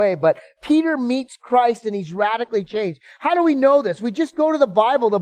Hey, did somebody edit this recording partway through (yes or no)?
no